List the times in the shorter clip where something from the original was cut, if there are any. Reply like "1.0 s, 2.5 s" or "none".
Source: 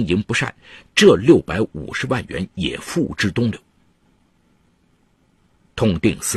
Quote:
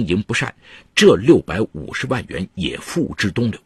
none